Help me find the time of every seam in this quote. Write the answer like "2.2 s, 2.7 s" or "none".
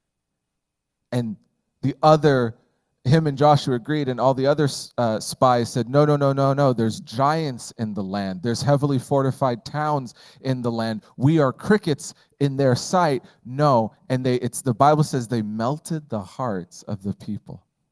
none